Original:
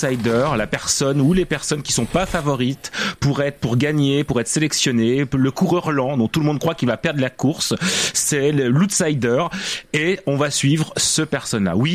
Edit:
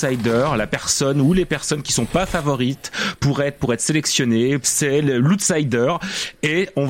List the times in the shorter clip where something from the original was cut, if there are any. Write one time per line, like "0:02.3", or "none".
0:03.6
0:04.6